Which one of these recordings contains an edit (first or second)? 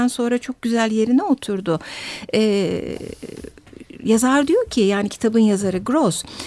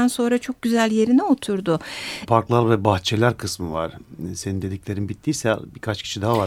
second